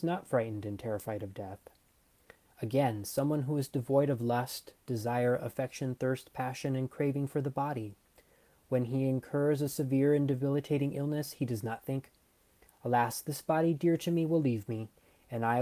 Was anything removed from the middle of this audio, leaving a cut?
no; 0 cuts

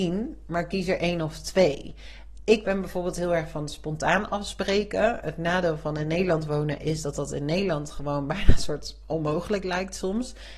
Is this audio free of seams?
yes; 0 cuts

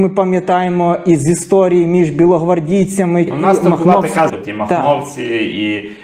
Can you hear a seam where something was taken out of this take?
yes; 2 cuts; at 3.3 s, 4.3 s

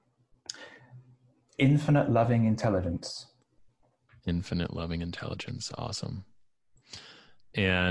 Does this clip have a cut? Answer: no; 0 cuts

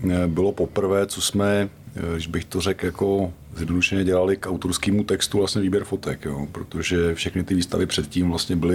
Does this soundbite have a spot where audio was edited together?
no; 0 cuts

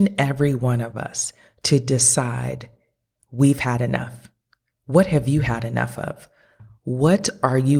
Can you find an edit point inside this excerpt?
no; 0 cuts

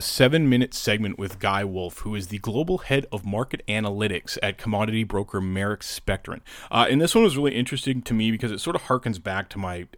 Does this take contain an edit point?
no; 0 cuts

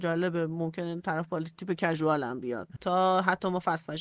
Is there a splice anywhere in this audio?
yes; 1 cut; at 2.8 s

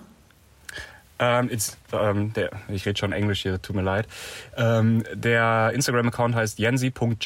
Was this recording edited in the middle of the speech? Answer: no; 0 cuts

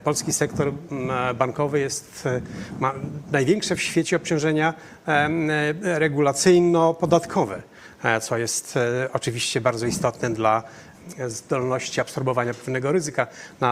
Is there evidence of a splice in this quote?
no; 0 cuts

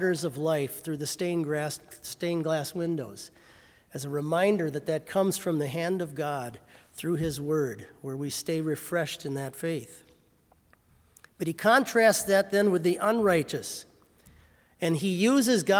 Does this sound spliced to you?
no; 0 cuts

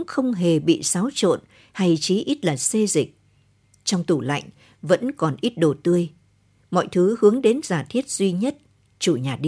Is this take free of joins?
yes; 0 cuts

